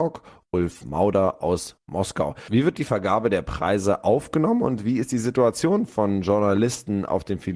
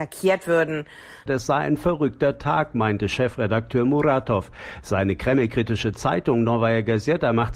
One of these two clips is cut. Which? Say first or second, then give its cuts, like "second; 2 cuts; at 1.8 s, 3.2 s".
second; 1 cut; at 1.3 s